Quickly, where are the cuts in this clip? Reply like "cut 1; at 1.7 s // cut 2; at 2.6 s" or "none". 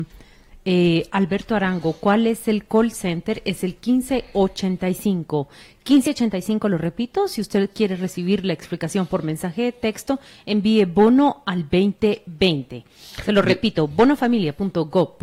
none